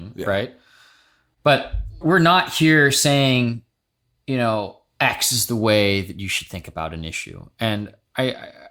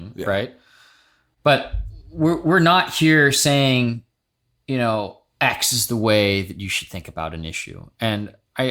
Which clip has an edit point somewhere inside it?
first; 1 cut; at 2.0 s

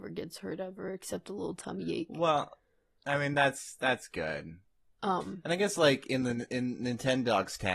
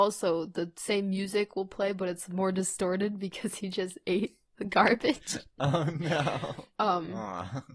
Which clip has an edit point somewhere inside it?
second; 1 cut; at 6.8 s

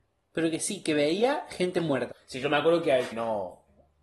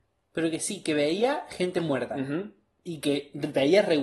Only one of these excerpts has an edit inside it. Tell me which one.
first; 2 cuts; at 2.1 s, 3.1 s

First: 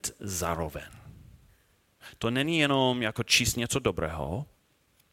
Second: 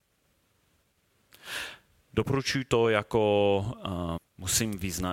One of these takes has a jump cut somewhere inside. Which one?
second; 1 cut; at 4.2 s

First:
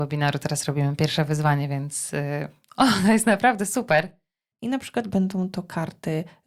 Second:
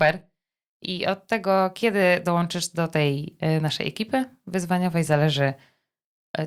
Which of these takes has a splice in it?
first; 1 cut; at 4.5 s

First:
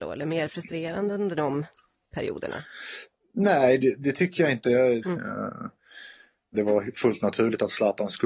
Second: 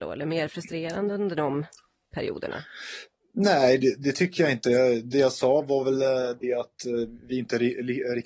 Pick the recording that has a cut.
first; 2 cuts; at 5.0 s, 6.5 s

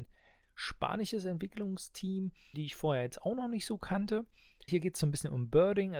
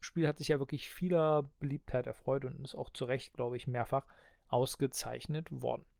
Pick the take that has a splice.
first; 2 cuts; at 2.5 s, 4.7 s

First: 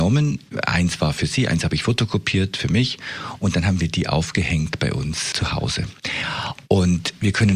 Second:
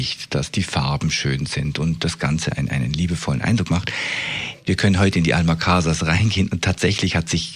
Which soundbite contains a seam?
first; 1 cut; at 5.3 s

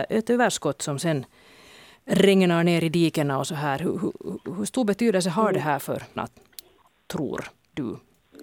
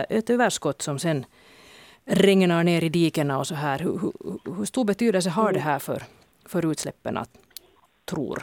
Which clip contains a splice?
first; 1 cut; at 6.2 s

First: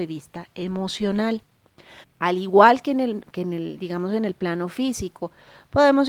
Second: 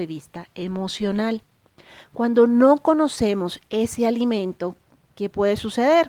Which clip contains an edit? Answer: first; 1 cut; at 2.0 s

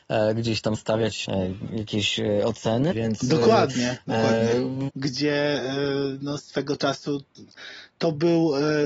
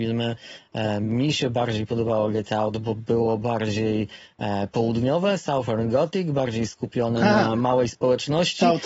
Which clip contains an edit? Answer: first; 3 cuts; at 1.2 s, 2.9 s, 4.9 s

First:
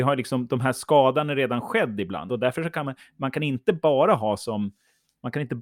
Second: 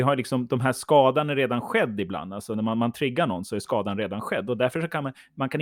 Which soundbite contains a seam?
first; 1 cut; at 2.3 s

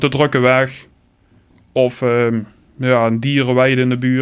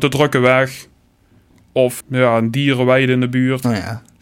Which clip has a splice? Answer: second; 1 cut; at 2.0 s

